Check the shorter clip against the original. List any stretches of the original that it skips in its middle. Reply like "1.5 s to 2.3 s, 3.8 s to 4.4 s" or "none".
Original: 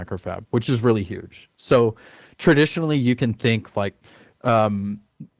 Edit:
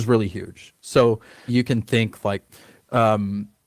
2.2 s to 3.0 s